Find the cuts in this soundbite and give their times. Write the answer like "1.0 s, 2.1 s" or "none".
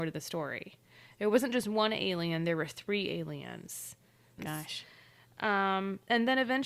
4.4 s